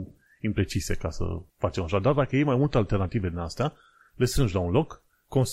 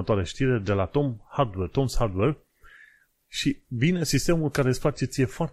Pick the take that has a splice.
first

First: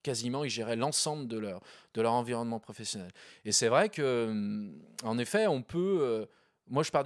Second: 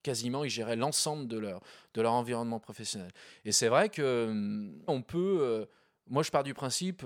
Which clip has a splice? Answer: second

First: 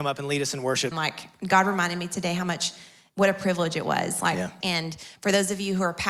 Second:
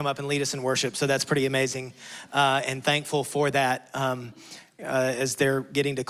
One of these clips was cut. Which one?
first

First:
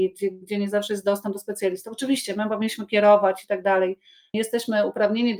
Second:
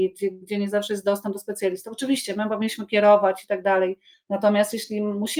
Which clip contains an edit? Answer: second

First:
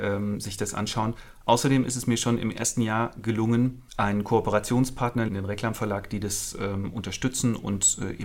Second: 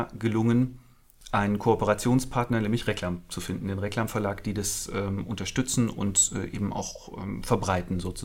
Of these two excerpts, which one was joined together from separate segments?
first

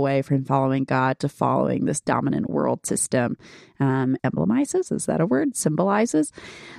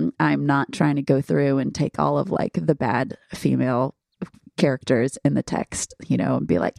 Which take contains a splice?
first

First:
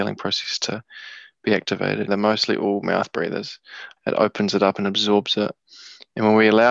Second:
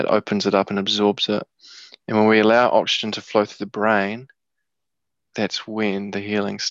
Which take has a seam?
first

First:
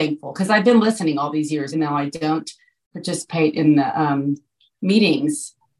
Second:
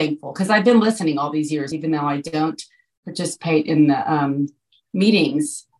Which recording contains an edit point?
first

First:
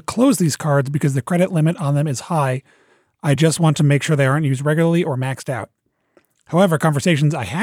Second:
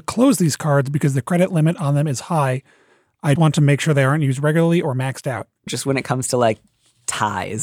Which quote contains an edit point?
second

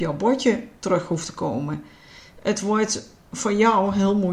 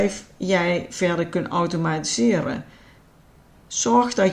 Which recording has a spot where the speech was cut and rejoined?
first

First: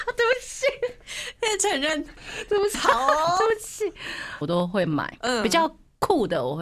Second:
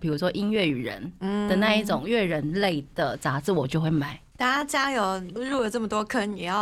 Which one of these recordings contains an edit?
first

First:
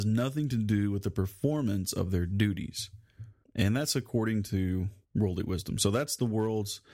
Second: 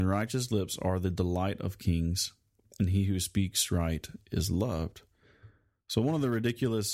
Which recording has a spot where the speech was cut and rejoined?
first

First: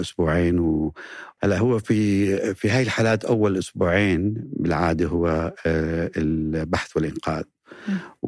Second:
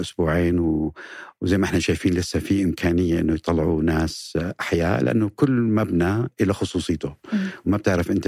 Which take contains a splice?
first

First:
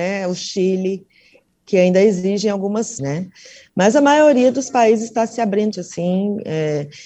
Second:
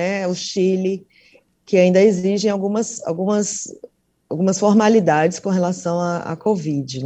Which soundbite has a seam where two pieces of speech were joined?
first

